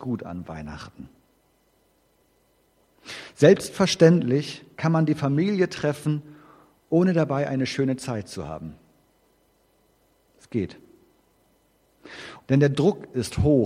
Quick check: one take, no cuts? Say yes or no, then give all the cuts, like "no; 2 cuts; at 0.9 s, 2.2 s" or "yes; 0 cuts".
no; 1 cut; at 12.4 s